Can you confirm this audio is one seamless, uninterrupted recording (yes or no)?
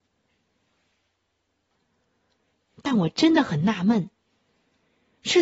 no